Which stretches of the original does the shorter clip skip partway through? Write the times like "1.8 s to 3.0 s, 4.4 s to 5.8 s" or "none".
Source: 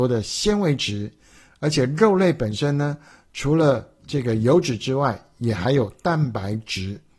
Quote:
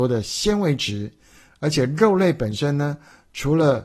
none